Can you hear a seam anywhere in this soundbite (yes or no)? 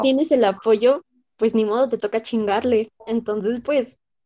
yes